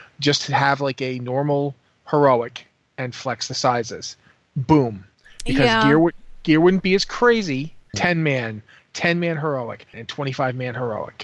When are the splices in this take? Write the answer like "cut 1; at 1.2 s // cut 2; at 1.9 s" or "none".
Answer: cut 1; at 7.9 s // cut 2; at 9.9 s